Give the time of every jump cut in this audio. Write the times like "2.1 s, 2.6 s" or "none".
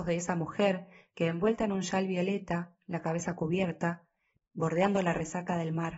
4.4 s